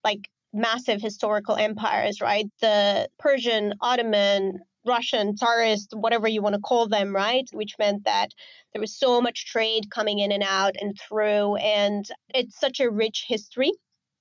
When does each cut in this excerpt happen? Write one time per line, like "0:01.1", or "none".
0:07.5